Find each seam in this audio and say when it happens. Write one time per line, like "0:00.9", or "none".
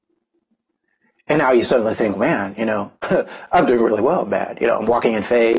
none